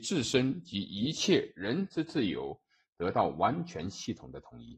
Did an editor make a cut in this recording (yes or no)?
no